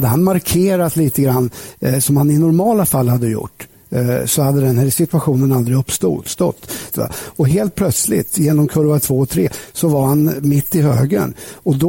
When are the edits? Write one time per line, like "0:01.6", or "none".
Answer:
0:06.9